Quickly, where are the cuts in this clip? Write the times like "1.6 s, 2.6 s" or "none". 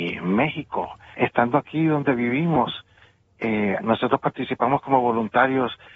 1.1 s, 3.8 s